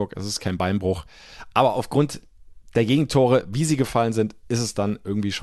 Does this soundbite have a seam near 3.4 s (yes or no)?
no